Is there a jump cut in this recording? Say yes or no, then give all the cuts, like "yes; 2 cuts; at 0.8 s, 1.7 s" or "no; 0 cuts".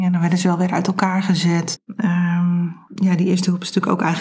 yes; 2 cuts; at 1.8 s, 2.9 s